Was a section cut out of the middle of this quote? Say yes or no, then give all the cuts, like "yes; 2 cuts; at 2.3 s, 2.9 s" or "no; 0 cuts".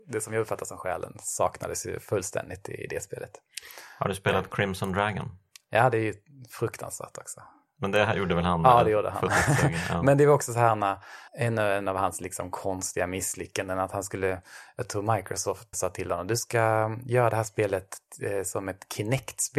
yes; 2 cuts; at 11.3 s, 15.7 s